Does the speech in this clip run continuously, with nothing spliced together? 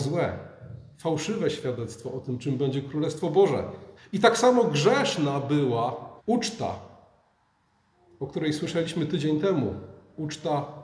no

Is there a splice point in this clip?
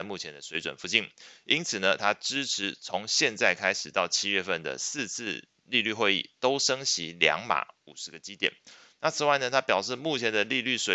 no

